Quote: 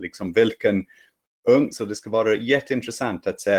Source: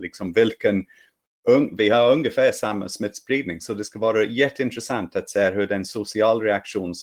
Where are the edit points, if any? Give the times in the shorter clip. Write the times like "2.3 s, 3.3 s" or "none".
1.7 s

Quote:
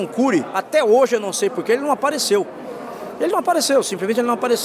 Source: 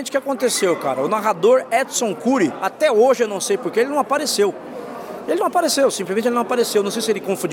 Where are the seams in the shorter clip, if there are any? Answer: none

